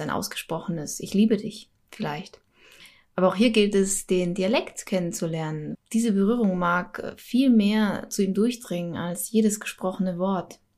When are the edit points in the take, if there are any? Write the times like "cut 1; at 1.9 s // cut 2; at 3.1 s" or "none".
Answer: cut 1; at 5.7 s